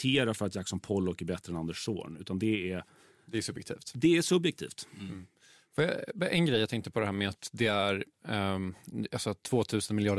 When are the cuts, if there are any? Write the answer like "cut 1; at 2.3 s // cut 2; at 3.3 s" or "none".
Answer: none